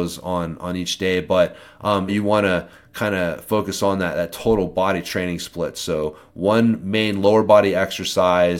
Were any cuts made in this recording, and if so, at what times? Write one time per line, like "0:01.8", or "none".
0:02.1